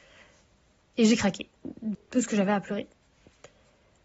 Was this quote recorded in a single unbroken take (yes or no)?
no